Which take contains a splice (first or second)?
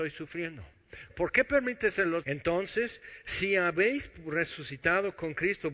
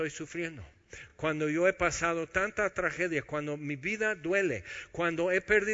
first